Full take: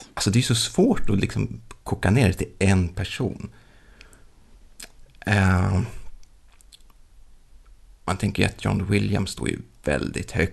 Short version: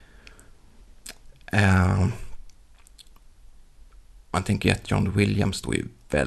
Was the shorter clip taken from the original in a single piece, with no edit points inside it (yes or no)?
yes